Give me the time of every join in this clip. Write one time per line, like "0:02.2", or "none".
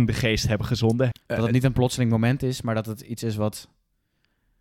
0:01.1